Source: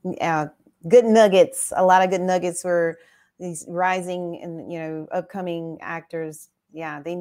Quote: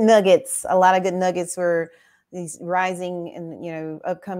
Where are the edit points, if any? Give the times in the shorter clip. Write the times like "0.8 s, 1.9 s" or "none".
none